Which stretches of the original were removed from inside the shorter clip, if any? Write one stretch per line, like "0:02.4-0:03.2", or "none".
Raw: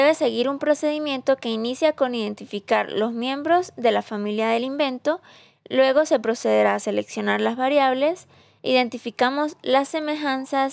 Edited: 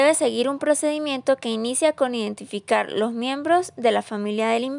none

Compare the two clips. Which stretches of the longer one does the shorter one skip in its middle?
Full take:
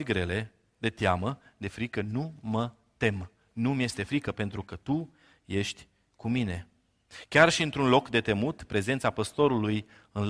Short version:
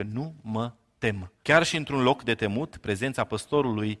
0:03.4-0:07.3

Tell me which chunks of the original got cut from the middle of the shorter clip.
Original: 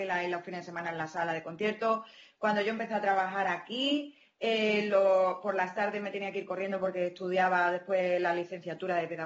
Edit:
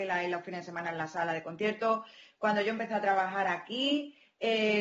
none

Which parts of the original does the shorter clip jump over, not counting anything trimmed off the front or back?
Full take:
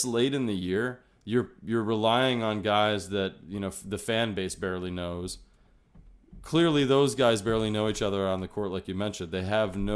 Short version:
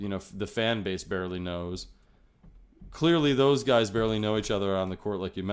none

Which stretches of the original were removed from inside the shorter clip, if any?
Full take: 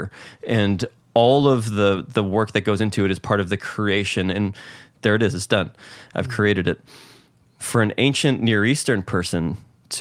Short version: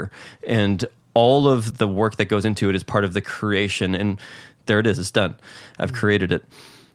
0:01.7-0:02.1

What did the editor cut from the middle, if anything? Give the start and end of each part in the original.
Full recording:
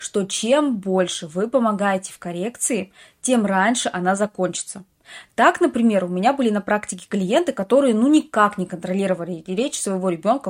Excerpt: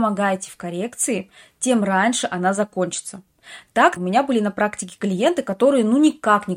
0:05.6-0:06.1

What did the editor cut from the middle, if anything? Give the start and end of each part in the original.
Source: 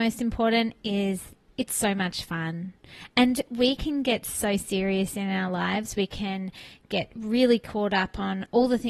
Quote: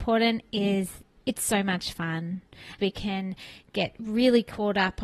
0:03.1-0:05.9

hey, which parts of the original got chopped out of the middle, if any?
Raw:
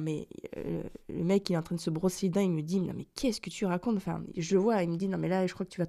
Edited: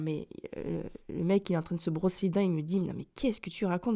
none

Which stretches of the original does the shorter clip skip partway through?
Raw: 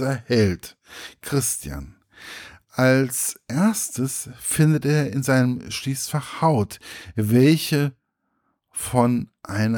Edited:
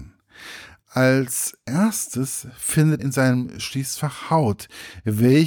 0:04.8-0:05.1

